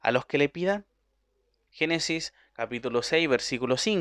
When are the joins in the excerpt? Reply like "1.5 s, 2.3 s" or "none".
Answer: 1.7 s